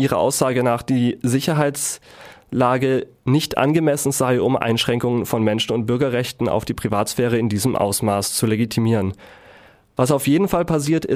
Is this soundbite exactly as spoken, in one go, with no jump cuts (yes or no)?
yes